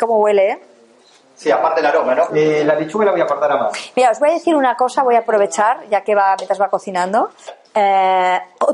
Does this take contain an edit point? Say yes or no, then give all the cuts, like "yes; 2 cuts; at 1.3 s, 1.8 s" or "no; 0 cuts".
yes; 2 cuts; at 2.3 s, 7.6 s